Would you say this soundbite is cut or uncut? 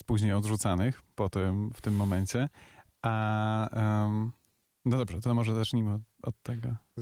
uncut